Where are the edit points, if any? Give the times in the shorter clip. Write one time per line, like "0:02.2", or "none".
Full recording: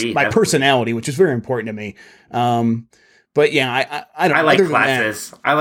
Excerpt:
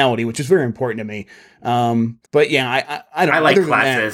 0:02.3